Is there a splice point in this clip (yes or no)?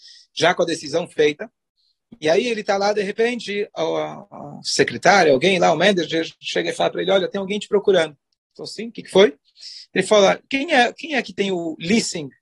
no